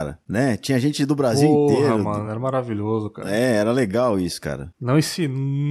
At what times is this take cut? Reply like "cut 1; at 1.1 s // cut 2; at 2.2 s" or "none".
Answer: none

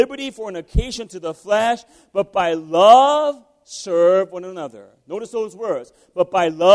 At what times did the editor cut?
none

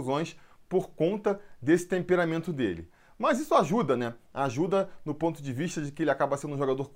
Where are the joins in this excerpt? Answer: none

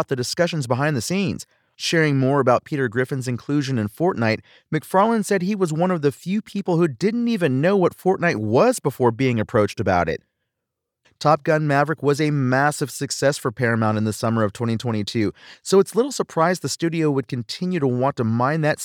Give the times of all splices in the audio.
cut 1; at 1.7 s // cut 2; at 11.0 s

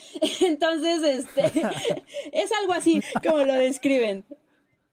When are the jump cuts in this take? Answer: cut 1; at 3.0 s

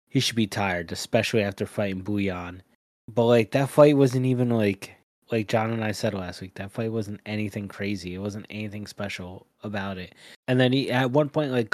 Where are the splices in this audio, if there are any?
cut 1; at 10.4 s

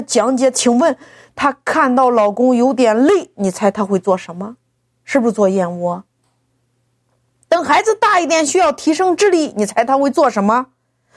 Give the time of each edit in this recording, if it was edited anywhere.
none

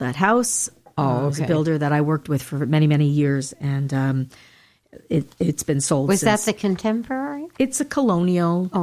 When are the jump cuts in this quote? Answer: none

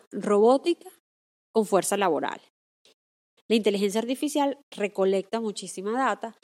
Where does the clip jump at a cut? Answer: cut 1; at 3.4 s

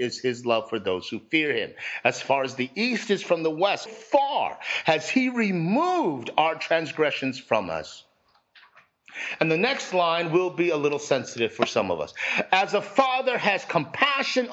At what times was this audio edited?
cut 1; at 3.9 s

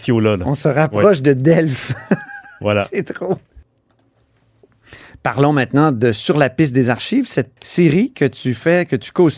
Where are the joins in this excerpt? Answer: cut 1; at 7.6 s

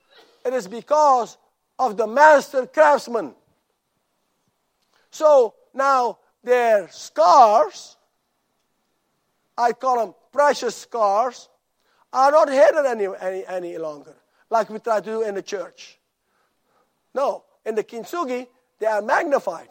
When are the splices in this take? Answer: cut 1; at 17.1 s

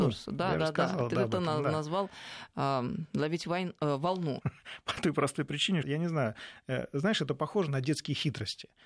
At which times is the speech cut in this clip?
cut 1; at 4.4 s // cut 2; at 5.8 s

